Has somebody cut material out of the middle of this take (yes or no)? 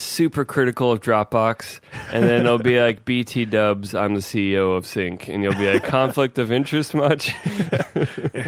yes